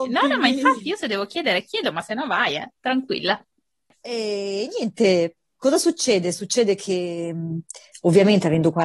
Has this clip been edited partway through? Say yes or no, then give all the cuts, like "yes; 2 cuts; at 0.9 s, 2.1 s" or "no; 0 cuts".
no; 0 cuts